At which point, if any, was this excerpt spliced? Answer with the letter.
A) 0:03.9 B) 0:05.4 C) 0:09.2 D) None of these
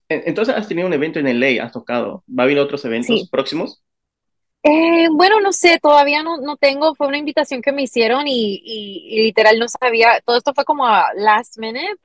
D